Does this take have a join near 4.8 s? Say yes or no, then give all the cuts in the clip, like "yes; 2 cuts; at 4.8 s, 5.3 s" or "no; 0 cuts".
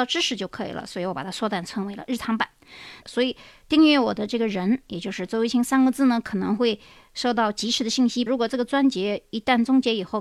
no; 2 cuts; at 3.0 s, 8.3 s